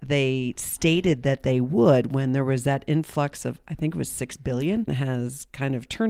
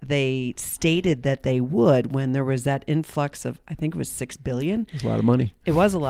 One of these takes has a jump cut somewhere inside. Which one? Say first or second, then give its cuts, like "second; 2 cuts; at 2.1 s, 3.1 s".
first; 1 cut; at 4.9 s